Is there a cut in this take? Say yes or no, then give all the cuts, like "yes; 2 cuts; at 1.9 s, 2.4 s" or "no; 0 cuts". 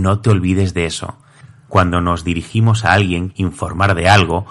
yes; 2 cuts; at 1.6 s, 3.3 s